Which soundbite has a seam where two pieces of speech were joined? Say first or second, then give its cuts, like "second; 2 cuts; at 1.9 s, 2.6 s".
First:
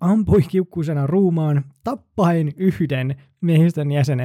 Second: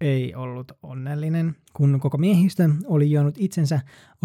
second; 1 cut; at 1.7 s